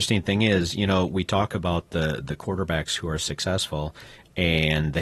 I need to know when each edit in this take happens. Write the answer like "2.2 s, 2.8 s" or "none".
none